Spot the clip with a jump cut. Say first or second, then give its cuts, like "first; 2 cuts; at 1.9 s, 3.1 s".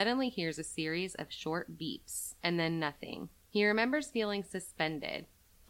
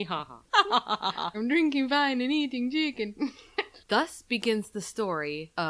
second; 2 cuts; at 1.3 s, 3.8 s